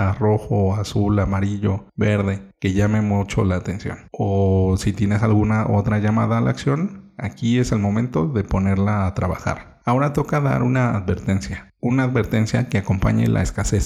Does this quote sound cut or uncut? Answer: uncut